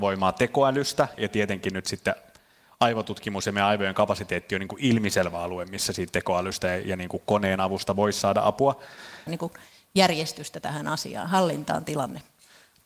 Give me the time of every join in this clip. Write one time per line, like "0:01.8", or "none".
0:01.2
0:09.3